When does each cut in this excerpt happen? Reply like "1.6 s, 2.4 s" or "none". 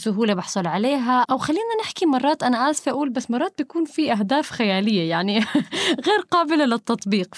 1.2 s